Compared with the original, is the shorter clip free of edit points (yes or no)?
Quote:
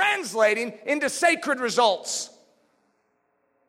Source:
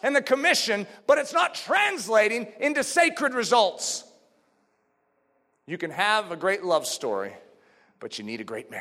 yes